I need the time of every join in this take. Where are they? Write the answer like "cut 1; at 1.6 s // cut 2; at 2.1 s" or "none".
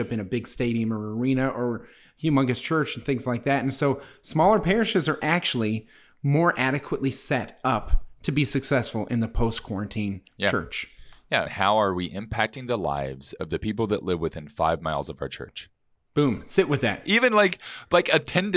cut 1; at 11.4 s